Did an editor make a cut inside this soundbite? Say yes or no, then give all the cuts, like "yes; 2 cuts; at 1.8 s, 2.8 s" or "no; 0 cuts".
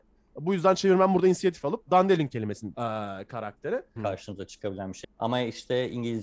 yes; 3 cuts; at 2.7 s, 4.0 s, 5.0 s